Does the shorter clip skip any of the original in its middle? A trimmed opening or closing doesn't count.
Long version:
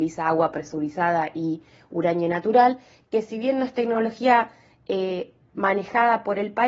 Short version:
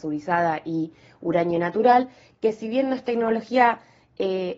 no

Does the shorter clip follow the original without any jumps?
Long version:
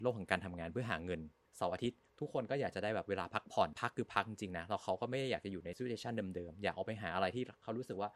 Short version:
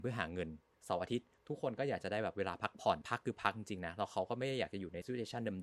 yes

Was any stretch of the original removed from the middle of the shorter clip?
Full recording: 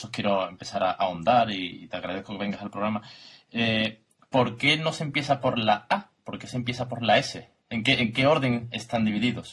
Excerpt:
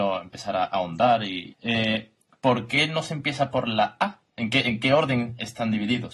yes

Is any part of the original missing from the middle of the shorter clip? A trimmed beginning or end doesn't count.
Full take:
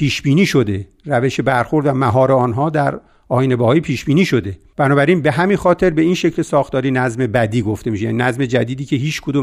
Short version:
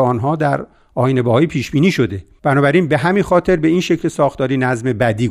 no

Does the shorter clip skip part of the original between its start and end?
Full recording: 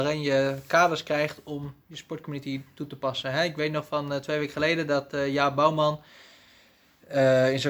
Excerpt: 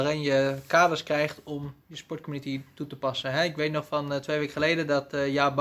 no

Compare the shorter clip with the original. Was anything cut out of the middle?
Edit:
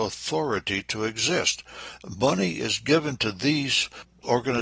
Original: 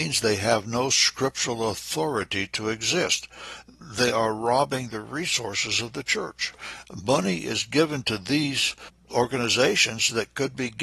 yes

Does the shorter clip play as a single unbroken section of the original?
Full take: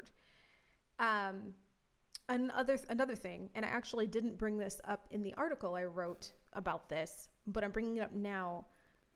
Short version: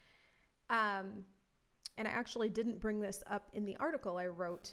no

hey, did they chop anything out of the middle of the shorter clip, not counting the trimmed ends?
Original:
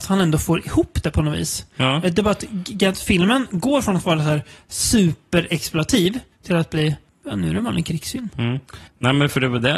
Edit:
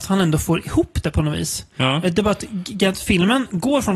no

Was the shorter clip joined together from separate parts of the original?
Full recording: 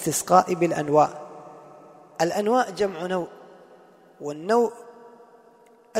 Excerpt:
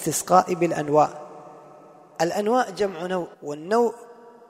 yes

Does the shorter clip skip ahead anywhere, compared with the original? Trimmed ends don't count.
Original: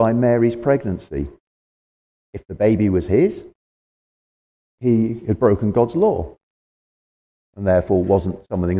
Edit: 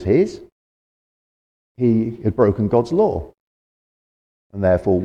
no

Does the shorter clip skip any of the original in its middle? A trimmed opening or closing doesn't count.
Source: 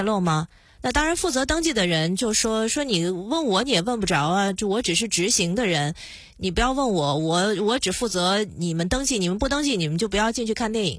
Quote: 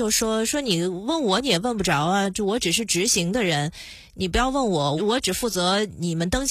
yes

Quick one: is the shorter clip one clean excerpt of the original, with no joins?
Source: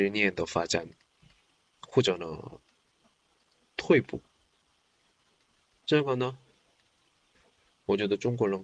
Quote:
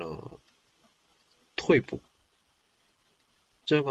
yes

